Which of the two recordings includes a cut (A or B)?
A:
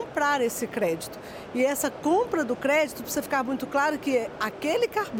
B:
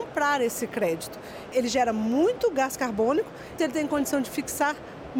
B